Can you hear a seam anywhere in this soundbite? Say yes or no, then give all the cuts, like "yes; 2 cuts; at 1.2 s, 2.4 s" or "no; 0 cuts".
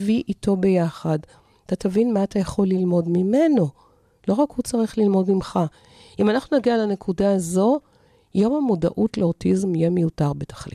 no; 0 cuts